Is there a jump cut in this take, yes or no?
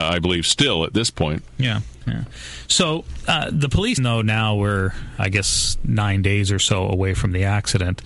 yes